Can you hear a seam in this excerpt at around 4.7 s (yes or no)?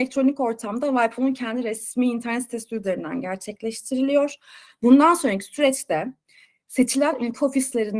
yes